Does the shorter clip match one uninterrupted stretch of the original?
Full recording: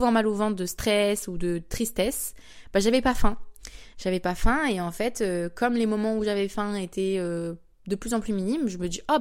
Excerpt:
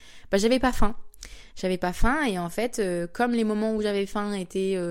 yes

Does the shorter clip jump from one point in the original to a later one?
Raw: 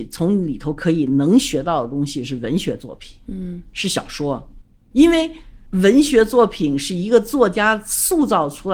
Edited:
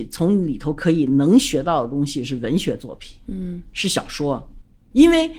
no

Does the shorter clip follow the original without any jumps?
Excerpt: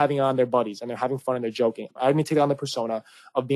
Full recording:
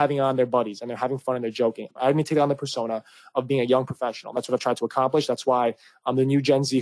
yes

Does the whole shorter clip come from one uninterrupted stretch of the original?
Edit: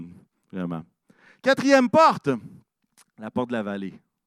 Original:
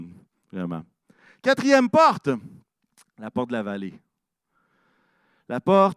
yes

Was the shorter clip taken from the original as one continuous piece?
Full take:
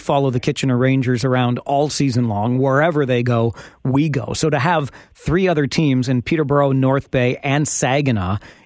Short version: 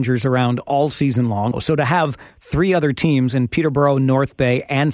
no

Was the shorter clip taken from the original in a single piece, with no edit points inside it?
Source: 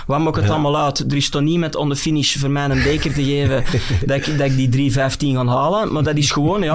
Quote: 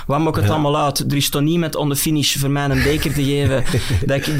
yes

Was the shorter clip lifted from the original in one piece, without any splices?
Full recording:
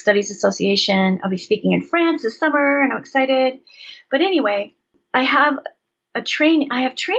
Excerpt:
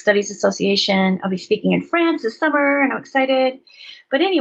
yes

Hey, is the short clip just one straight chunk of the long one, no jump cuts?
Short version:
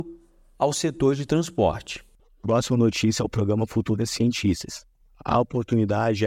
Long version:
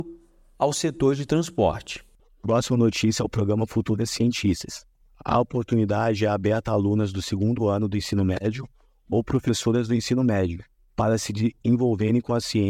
yes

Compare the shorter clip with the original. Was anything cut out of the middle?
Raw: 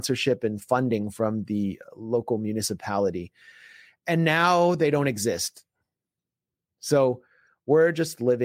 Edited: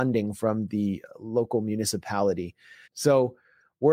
yes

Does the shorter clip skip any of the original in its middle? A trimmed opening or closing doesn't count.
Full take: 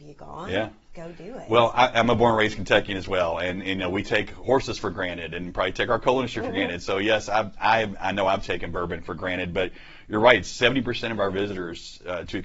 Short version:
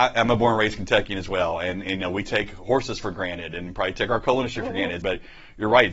yes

